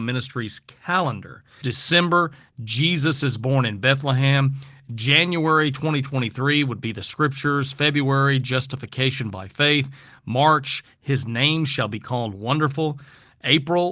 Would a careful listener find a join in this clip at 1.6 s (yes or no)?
yes